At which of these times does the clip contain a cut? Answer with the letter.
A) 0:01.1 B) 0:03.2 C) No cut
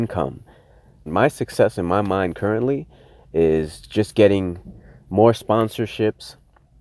A